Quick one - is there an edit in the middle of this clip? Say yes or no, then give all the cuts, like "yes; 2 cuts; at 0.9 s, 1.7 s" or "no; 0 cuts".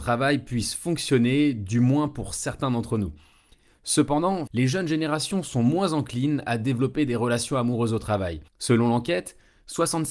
yes; 2 cuts; at 4.5 s, 8.5 s